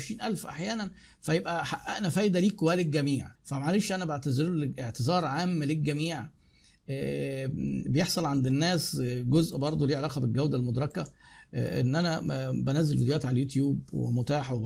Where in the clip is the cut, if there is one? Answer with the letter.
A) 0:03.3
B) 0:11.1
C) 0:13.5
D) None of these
A